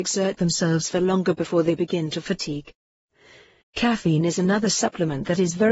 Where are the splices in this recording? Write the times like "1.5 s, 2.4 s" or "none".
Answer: 3.6 s